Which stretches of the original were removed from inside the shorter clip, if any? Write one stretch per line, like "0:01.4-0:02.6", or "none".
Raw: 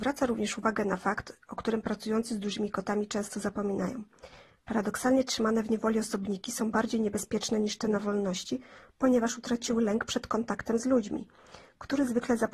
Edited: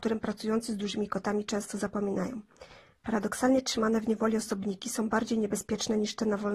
none